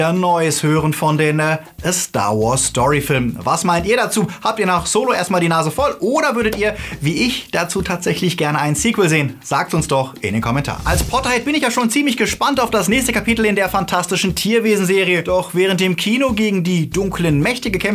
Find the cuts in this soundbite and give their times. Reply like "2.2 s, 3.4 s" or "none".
none